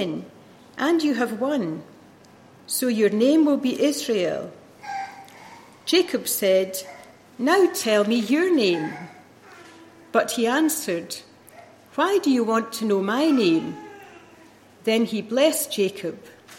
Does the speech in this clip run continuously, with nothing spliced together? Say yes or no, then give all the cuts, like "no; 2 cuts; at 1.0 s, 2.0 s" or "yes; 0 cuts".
yes; 0 cuts